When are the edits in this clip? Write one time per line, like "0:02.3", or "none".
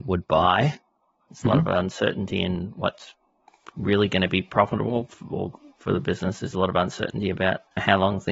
none